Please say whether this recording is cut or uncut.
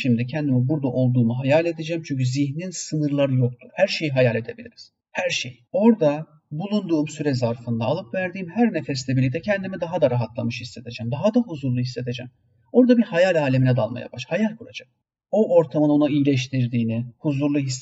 cut